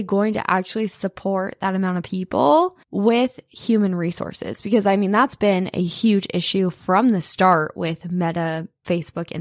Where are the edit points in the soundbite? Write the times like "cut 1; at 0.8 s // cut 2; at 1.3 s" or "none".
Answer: cut 1; at 2.8 s

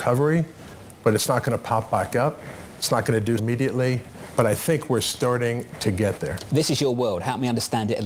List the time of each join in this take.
cut 1; at 3.4 s

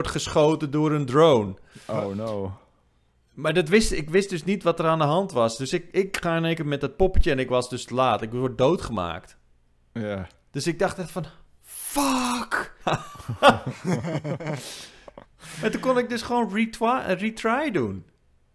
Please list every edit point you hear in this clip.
cut 1; at 12.8 s

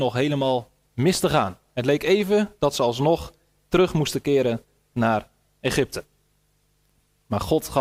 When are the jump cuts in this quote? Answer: none

